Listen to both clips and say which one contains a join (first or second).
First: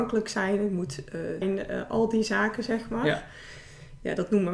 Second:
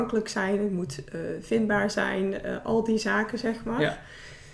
first